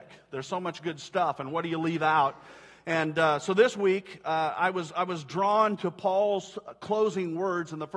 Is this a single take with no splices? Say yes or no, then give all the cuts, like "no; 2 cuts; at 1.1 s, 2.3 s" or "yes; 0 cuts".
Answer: yes; 0 cuts